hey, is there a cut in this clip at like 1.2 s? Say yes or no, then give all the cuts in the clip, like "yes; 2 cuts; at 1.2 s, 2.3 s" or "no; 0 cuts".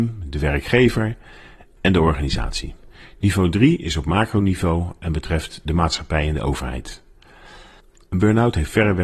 no; 0 cuts